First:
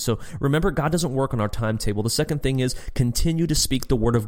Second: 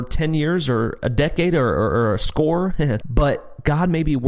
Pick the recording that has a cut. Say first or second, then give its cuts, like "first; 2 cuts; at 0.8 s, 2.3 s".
second; 1 cut; at 3.0 s